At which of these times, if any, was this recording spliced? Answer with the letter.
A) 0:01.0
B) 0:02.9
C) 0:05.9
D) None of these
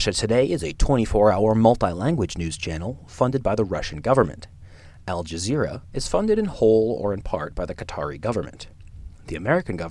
C